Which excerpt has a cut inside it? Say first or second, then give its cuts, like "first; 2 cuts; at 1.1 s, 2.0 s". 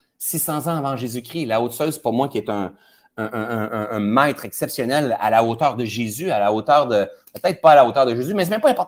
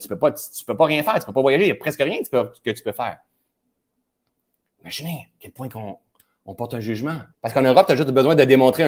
second; 1 cut; at 7.3 s